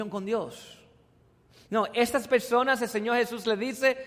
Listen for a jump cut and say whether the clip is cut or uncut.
uncut